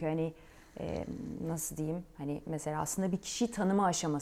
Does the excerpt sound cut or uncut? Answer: uncut